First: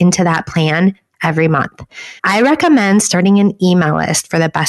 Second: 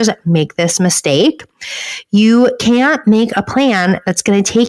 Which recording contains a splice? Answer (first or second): first